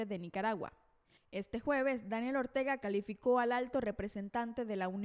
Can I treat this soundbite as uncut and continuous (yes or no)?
no